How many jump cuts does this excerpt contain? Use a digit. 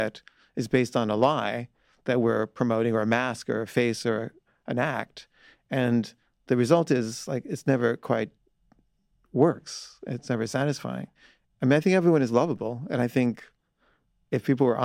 0